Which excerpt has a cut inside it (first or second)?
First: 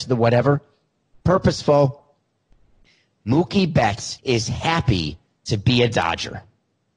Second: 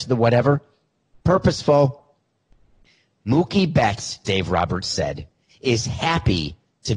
first